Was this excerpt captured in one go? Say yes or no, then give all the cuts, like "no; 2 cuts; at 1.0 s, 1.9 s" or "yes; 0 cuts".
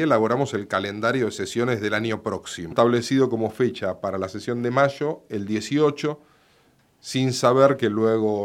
no; 1 cut; at 2.7 s